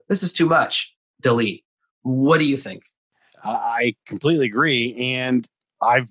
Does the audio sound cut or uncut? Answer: uncut